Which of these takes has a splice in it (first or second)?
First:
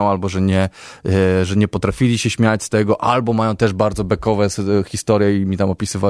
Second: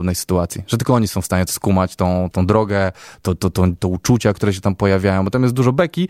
second